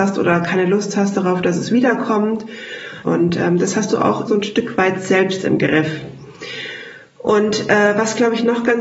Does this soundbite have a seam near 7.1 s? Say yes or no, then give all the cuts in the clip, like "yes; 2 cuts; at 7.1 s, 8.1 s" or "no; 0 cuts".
no; 2 cuts; at 3.0 s, 4.3 s